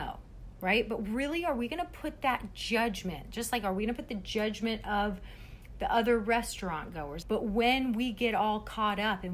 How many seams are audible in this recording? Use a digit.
1